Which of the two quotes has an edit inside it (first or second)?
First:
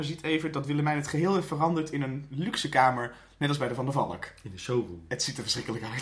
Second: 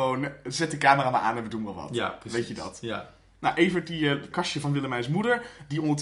second